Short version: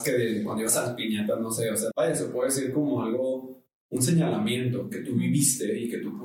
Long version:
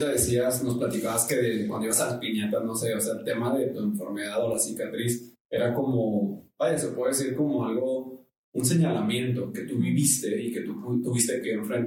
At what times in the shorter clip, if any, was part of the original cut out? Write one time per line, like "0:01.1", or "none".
0:01.9

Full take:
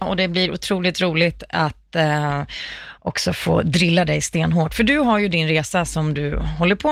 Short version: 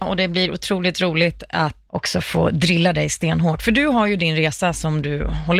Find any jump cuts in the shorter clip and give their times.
0:01.9

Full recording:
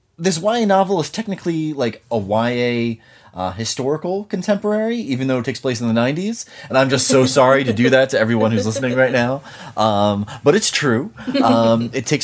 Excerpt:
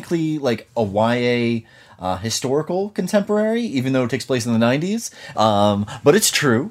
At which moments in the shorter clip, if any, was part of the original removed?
0:05.3

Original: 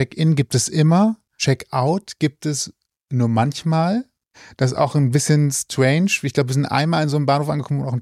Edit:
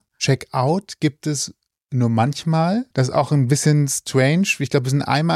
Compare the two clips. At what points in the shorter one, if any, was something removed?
0:02.9

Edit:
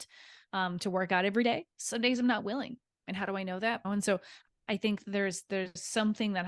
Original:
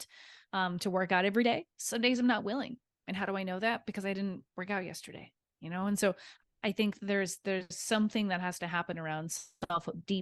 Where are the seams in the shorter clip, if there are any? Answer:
0:03.8

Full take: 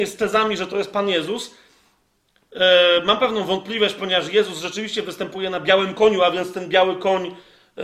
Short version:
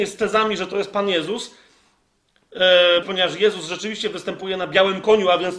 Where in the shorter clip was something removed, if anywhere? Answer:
0:03.0

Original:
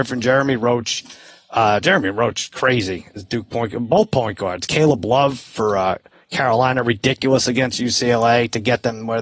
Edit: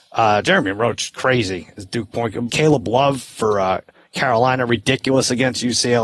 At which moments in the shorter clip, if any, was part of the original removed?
0:02.5

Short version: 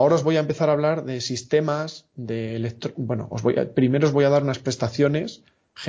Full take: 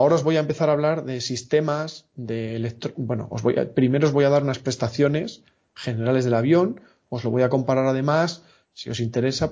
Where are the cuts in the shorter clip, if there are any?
none

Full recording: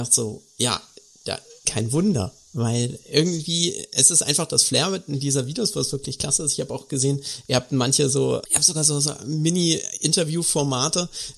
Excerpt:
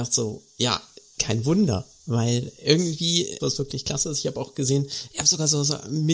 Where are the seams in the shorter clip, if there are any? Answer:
0:01.1
0:03.4
0:05.1

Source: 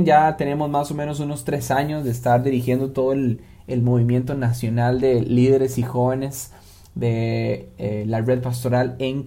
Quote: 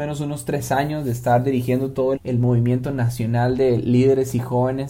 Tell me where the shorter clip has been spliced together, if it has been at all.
0:02.1

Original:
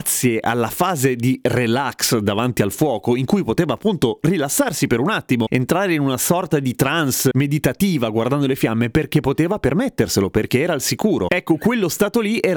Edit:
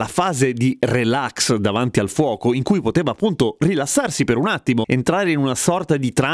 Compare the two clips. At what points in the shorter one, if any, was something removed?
none

